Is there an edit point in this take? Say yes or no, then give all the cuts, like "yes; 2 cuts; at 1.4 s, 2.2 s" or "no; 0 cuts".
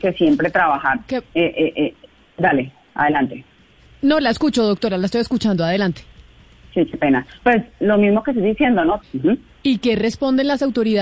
yes; 2 cuts; at 7.4 s, 9.0 s